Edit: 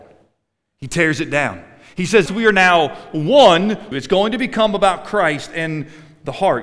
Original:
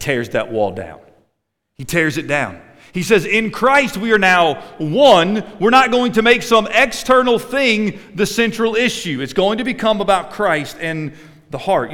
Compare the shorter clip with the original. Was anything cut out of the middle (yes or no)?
yes